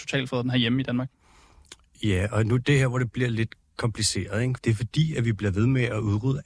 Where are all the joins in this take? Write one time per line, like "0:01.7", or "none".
0:04.6